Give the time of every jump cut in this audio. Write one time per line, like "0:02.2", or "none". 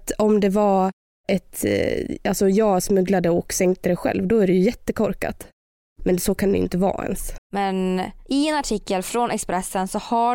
0:07.4

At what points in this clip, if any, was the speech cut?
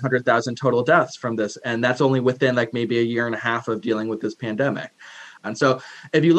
0:05.4

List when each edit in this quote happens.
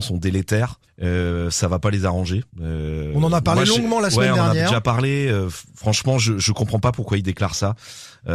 0:02.5

